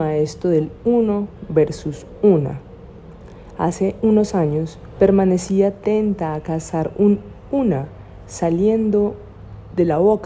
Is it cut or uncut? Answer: cut